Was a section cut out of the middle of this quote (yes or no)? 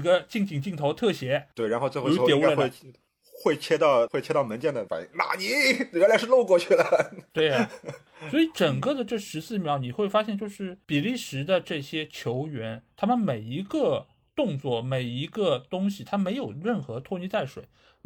no